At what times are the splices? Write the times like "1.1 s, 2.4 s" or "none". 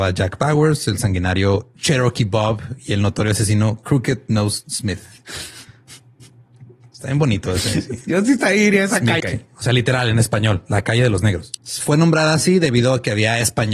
9.2 s, 11.6 s